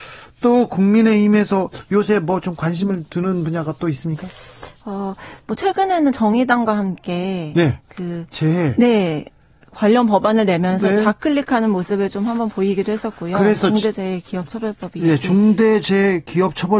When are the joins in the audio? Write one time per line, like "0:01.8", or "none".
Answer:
none